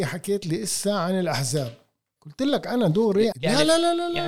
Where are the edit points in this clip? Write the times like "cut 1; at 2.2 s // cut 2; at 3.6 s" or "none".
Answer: cut 1; at 3.3 s